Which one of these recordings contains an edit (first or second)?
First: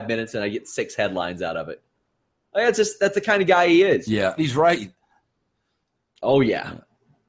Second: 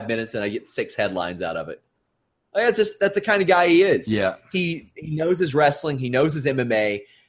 first